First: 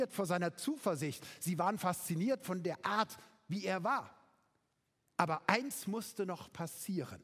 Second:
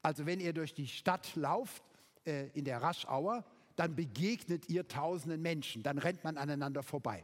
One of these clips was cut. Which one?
second; 1 cut; at 5.8 s

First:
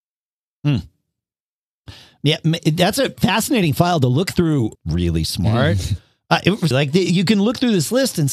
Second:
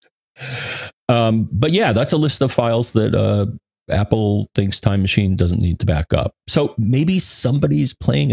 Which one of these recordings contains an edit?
first; 2 cuts; at 4.8 s, 6.7 s

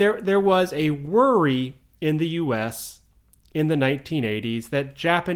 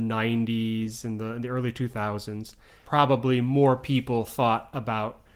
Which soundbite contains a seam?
second; 1 cut; at 2.8 s

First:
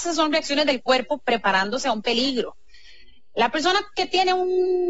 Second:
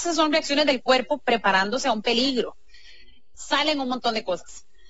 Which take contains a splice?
second; 1 cut; at 3.3 s

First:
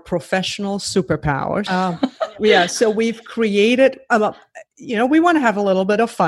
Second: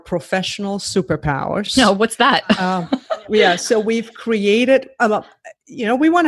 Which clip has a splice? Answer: first; 1 cut; at 1.7 s

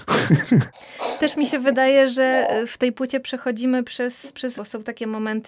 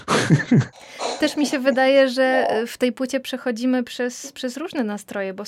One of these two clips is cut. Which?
first; 1 cut; at 4.6 s

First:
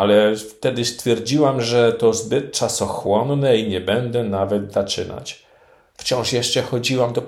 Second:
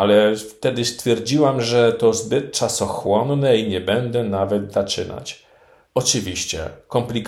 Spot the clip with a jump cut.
second; 1 cut; at 5.8 s

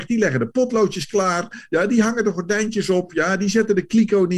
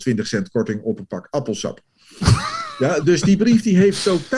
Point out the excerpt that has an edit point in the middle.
second; 1 cut; at 3.0 s

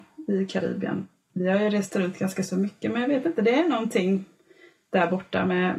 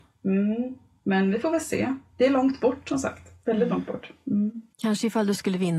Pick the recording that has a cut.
second; 1 cut; at 4.7 s

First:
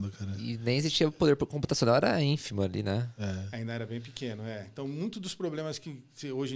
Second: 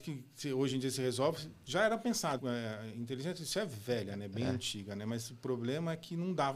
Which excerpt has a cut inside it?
second; 1 cut; at 2.4 s

